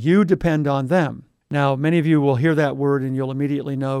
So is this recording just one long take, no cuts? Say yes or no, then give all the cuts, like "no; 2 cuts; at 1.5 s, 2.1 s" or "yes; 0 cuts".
no; 1 cut; at 1.4 s